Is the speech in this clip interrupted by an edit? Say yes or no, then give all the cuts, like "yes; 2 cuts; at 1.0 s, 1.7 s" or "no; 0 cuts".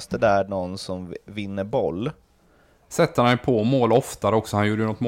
yes; 1 cut; at 2.9 s